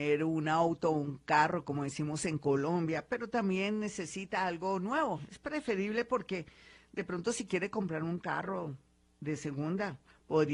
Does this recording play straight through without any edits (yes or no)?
yes